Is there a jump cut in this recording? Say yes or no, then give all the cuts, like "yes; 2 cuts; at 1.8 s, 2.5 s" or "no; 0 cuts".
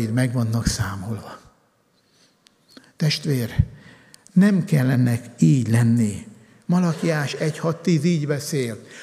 no; 0 cuts